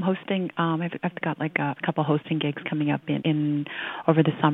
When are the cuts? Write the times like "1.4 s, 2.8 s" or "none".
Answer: 1.8 s, 3.2 s